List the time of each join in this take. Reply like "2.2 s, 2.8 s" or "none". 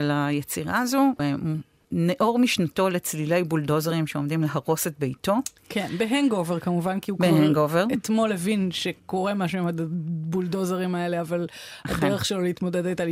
1.2 s